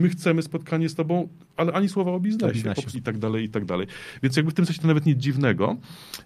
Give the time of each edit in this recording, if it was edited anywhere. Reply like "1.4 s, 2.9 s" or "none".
2.9 s

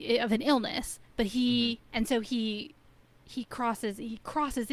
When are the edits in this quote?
1.9 s

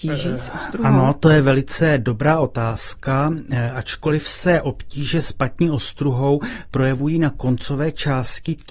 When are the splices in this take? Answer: none

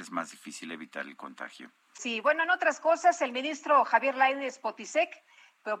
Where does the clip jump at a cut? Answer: 2.0 s

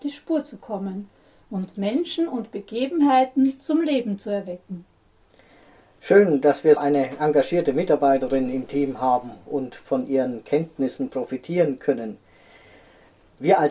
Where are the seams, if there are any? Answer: 6.8 s

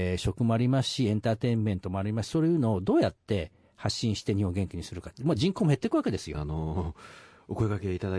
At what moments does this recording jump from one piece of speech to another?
6.3 s

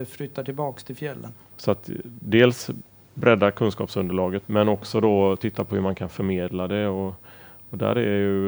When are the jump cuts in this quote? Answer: 1.5 s, 4.4 s

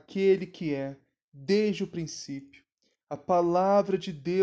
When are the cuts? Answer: 3.0 s

